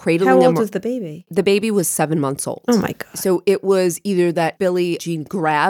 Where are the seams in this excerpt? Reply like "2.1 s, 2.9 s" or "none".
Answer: none